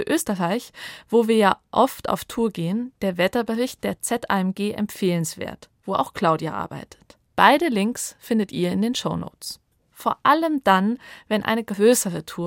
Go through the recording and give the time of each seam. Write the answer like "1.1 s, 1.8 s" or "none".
7.2 s, 9.8 s